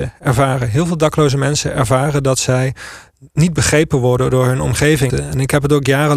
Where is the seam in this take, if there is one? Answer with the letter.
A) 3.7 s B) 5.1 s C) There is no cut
B